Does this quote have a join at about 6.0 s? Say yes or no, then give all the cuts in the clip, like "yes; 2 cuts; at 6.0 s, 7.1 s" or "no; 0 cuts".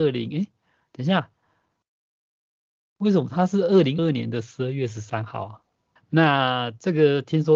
yes; 2 cuts; at 4.0 s, 6.0 s